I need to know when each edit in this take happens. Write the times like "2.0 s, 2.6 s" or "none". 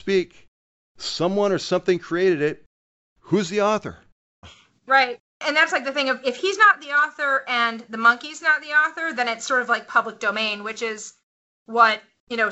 4.4 s